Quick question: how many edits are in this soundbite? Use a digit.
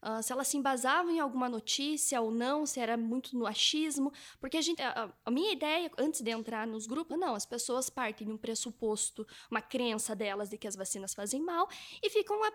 2